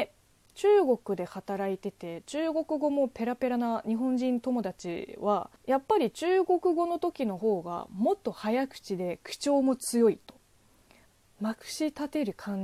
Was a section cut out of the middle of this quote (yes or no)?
yes